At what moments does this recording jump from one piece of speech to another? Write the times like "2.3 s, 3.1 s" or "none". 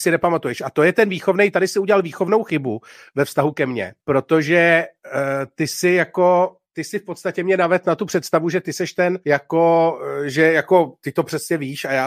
4.0 s, 9.2 s